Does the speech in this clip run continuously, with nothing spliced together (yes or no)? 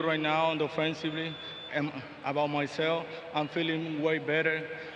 no